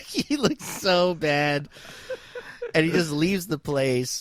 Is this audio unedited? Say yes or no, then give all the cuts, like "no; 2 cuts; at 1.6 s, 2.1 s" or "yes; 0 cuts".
yes; 0 cuts